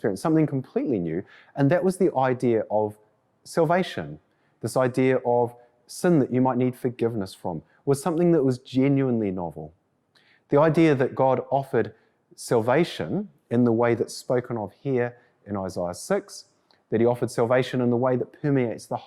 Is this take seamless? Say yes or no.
yes